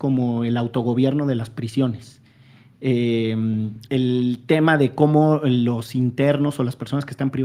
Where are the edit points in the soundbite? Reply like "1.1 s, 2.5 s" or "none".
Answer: 3.8 s